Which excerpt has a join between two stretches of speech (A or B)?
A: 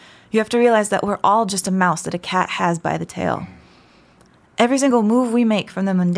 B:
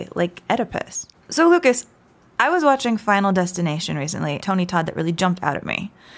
B